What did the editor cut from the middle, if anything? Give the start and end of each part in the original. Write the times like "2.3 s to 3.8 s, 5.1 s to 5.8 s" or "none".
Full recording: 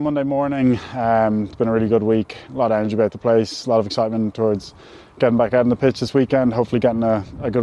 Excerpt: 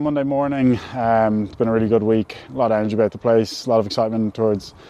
none